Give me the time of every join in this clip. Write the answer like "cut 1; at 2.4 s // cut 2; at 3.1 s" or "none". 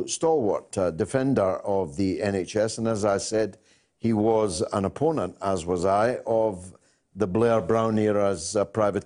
none